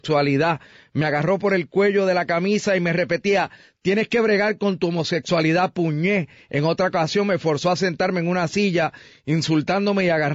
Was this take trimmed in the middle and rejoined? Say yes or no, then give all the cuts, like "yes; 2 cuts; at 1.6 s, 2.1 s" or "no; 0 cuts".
no; 0 cuts